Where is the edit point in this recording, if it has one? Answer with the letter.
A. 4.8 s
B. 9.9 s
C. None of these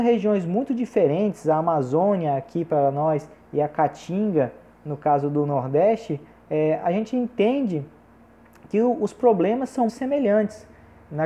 B